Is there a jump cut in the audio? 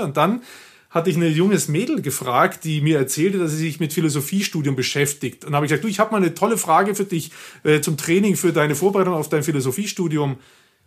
no; 0 cuts

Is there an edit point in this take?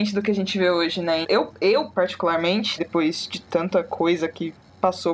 yes; 2 cuts; at 1.2 s, 2.8 s

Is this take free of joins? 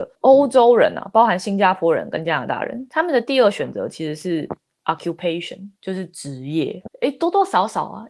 no; 1 cut; at 6.9 s

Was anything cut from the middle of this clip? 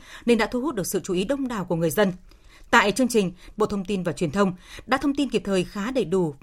yes; 1 cut; at 3.5 s

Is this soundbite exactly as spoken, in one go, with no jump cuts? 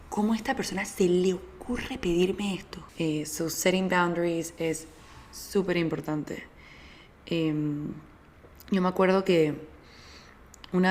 no; 1 cut; at 2.9 s

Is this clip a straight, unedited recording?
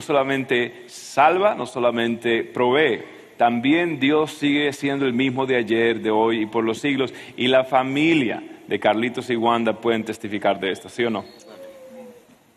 yes; 0 cuts

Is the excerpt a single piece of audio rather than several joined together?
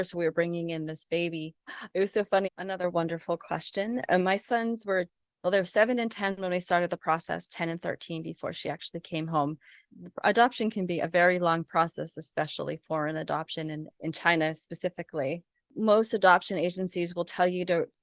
no; 3 cuts; at 2.4 s, 13.9 s, 15.6 s

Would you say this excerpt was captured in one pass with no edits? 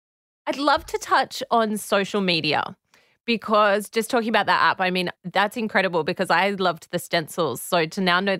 yes; 0 cuts

